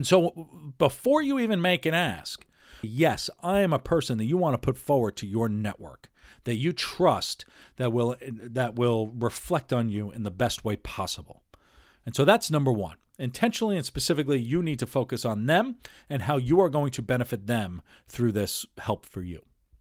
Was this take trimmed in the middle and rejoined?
yes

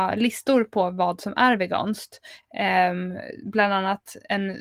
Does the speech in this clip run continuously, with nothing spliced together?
yes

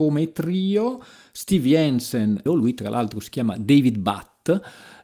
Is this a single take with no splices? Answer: no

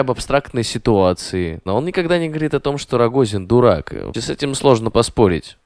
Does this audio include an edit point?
yes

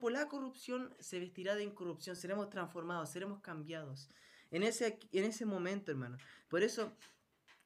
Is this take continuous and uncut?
yes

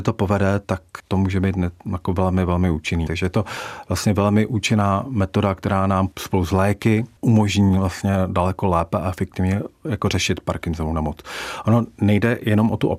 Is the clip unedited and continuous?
no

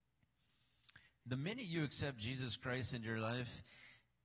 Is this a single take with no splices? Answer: no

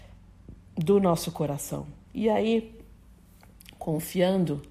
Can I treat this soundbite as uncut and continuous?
no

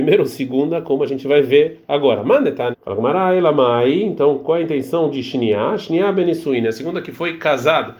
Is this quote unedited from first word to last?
no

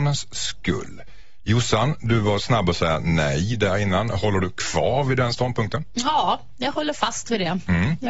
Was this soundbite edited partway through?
no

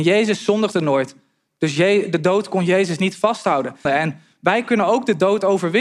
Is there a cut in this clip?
yes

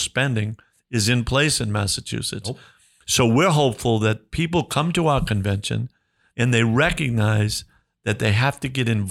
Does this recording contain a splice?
yes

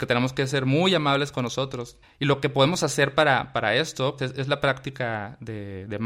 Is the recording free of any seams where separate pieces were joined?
no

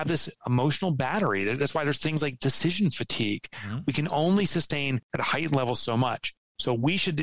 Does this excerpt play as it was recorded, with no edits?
yes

